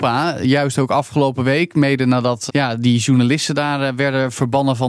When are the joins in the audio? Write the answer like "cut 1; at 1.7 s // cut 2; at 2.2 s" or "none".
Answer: cut 1; at 2.5 s